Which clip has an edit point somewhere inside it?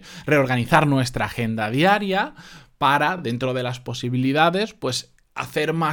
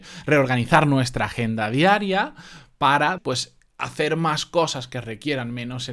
second; 1 cut; at 3.2 s

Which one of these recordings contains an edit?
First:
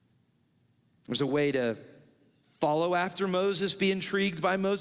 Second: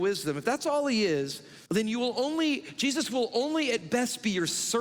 second; 1 cut; at 1.7 s

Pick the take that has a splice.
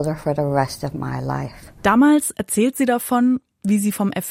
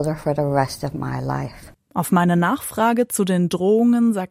second; 1 cut; at 1.7 s

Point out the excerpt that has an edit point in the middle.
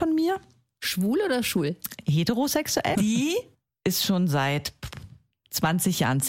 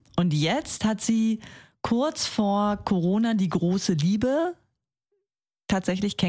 first; 1 cut; at 2.9 s

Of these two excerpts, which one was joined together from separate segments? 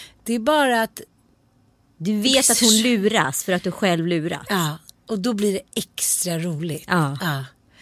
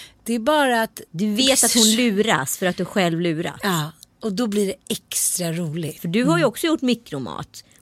second; 2 cuts; at 1.1 s, 6.0 s

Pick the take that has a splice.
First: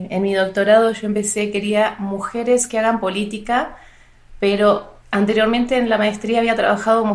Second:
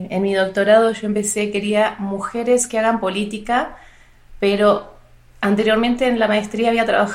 first; 1 cut; at 5.0 s

